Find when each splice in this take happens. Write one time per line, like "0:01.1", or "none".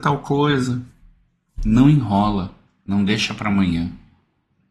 0:01.5